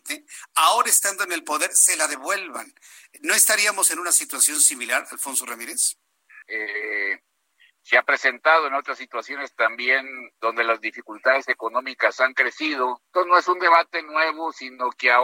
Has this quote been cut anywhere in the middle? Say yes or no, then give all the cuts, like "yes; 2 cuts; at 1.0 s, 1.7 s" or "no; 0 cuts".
yes; 2 cuts; at 6.4 s, 13.1 s